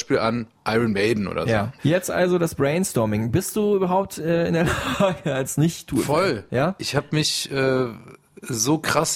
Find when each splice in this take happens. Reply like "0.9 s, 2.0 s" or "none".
none